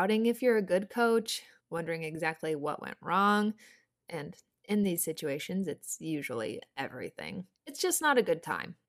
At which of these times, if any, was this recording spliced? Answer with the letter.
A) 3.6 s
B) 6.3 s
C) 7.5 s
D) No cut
D